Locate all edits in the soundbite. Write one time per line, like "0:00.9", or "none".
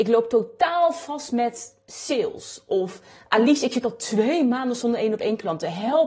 none